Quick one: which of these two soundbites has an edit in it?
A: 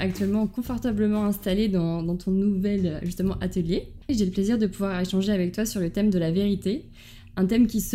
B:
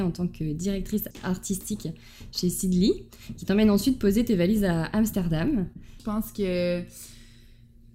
B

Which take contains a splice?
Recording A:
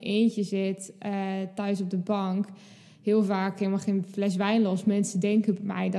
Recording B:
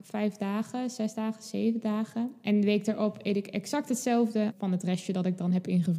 B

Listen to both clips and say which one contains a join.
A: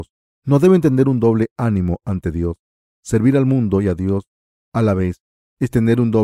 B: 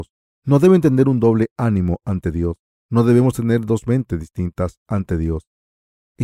B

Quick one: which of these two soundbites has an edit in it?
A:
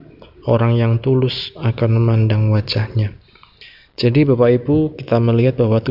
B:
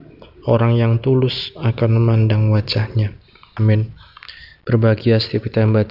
B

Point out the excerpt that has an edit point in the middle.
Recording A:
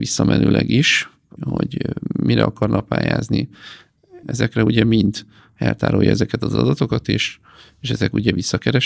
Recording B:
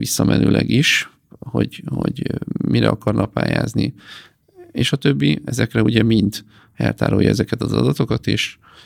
A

